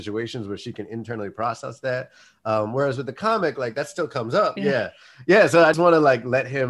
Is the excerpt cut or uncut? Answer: cut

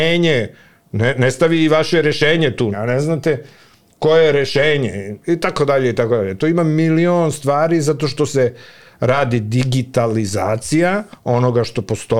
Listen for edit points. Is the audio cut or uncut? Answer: cut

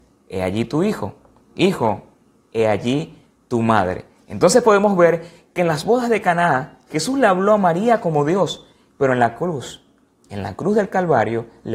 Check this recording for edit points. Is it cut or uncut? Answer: uncut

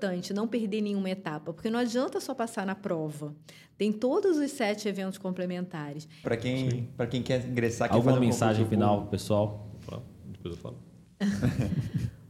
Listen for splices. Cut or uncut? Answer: cut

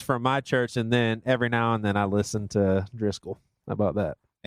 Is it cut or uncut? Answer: uncut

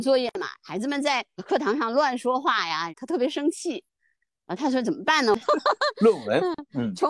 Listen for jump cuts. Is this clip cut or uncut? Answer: cut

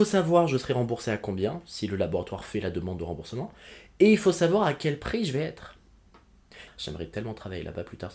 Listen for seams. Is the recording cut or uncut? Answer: cut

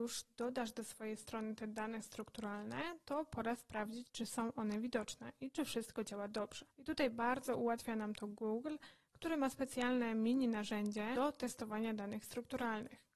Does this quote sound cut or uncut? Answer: cut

